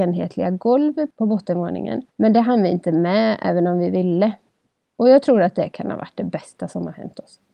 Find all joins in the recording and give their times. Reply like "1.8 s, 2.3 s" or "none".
2.1 s